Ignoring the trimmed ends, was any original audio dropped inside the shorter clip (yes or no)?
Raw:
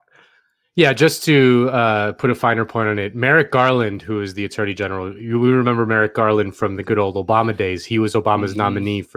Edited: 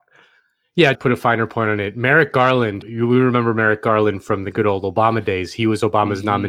yes